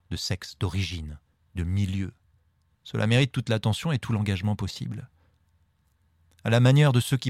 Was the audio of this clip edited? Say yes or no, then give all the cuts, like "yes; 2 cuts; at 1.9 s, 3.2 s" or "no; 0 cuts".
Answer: no; 0 cuts